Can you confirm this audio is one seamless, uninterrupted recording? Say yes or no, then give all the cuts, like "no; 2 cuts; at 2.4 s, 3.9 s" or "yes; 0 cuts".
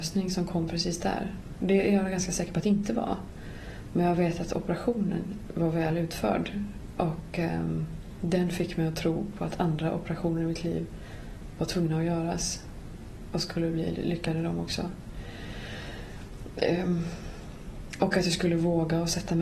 yes; 0 cuts